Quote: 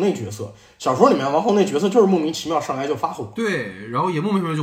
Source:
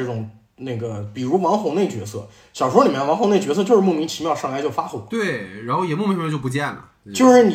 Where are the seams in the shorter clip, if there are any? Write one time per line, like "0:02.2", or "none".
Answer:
none

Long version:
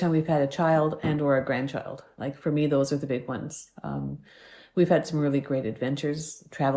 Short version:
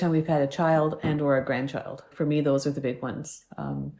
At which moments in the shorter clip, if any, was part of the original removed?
0:02.1

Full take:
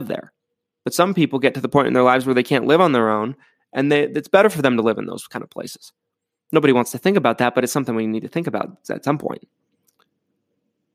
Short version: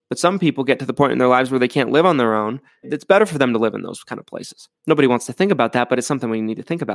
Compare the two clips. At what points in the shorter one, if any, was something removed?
0:02.8
0:04.8

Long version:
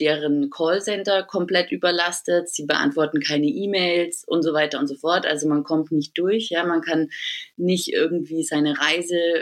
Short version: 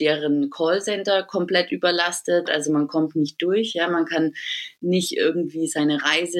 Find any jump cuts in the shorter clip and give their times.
0:02.5

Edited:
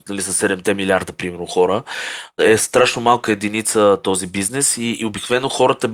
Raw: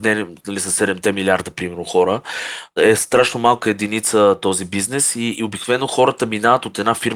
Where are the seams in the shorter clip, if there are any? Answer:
none

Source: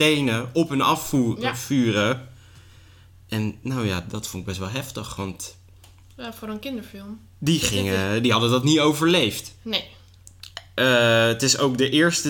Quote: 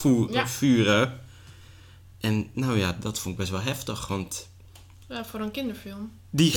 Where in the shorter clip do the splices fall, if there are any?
none

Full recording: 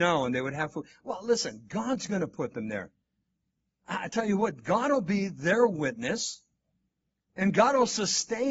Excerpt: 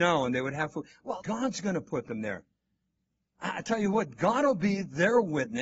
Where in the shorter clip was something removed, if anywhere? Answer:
0:01.2

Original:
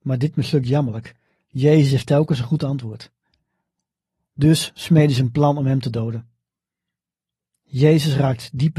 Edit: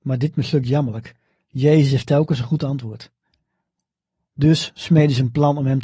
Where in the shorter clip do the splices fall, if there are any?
none

